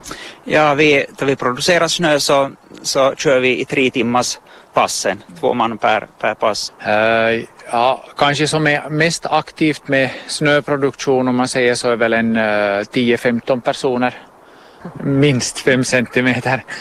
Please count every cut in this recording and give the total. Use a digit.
2